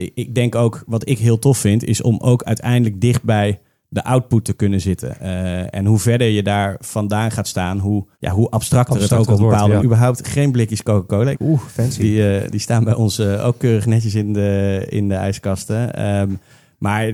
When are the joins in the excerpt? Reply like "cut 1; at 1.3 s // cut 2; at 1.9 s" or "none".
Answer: cut 1; at 8.1 s // cut 2; at 9.8 s // cut 3; at 11.3 s